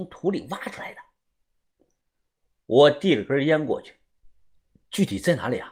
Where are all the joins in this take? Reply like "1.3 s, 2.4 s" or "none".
none